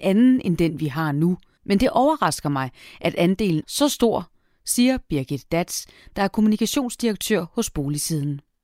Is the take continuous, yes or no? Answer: no